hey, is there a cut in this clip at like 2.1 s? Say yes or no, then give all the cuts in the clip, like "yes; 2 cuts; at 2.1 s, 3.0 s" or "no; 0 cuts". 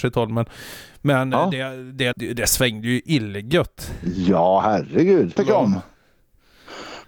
yes; 2 cuts; at 2.1 s, 5.4 s